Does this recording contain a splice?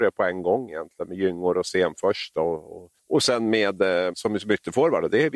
yes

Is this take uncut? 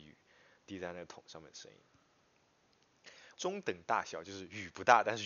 no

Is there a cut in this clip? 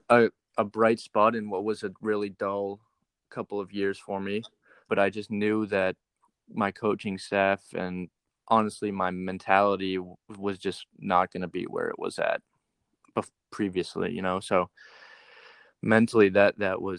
yes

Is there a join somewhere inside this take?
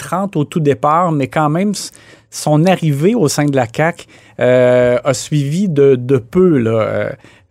no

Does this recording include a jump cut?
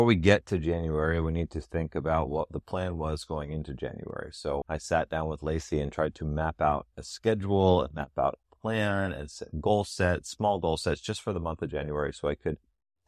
yes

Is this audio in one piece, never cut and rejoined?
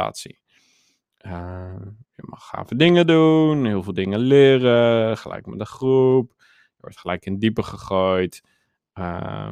yes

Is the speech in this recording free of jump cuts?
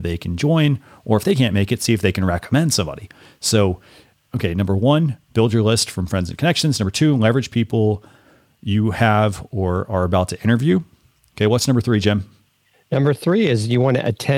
yes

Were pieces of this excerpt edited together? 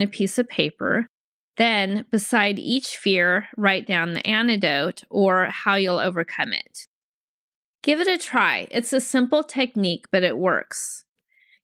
no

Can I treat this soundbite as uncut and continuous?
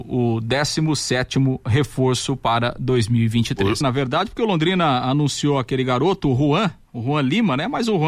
no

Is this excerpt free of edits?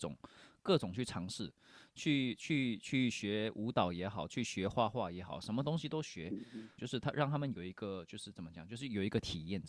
no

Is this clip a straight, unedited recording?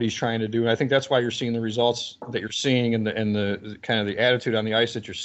yes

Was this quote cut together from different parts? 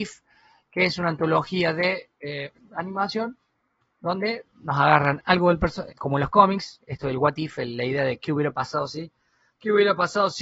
yes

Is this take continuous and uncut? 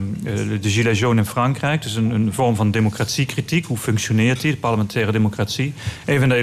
yes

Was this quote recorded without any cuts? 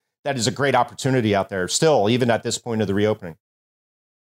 yes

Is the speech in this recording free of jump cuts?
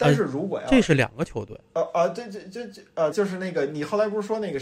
no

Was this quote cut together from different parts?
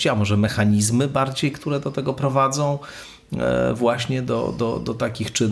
no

